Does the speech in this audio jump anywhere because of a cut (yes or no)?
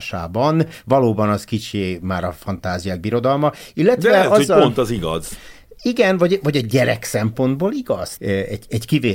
yes